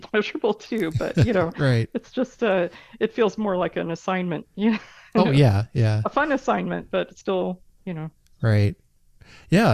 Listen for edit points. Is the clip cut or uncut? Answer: uncut